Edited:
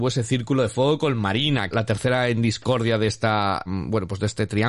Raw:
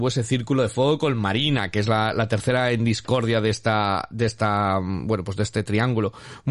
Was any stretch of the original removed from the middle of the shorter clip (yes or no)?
yes